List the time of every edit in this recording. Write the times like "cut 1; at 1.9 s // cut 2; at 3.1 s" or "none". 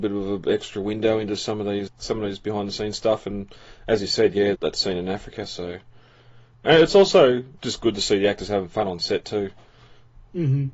cut 1; at 1.9 s // cut 2; at 4.5 s

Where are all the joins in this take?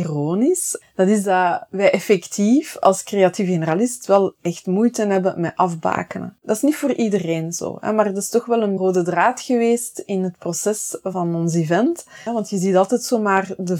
cut 1; at 12.3 s

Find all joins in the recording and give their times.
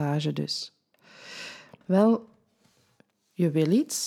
cut 1; at 1.8 s

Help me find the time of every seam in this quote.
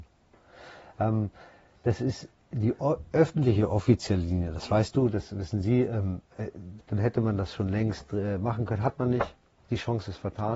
cut 1; at 6.8 s

